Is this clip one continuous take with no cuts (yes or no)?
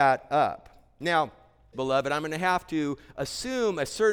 no